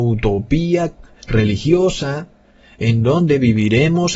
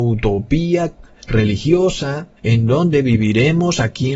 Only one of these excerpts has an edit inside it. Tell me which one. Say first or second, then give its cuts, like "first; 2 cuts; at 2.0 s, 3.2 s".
second; 1 cut; at 2.4 s